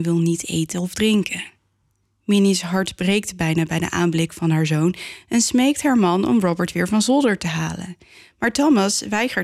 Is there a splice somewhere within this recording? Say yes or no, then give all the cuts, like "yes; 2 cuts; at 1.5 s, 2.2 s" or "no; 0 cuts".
no; 0 cuts